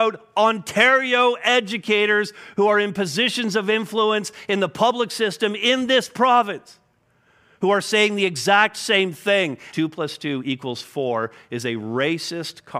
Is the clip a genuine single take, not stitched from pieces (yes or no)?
no